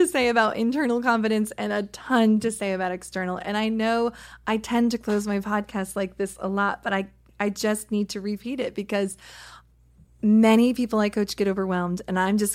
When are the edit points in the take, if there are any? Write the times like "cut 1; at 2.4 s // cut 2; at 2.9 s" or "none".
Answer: none